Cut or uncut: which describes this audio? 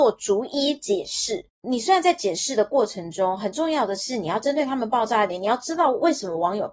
cut